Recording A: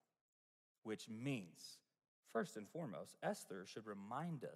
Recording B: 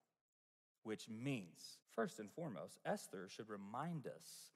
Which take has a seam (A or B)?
B